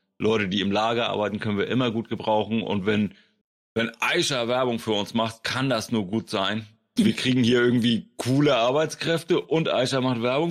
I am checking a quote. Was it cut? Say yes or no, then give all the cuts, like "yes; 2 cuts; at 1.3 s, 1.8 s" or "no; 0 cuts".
yes; 1 cut; at 7.0 s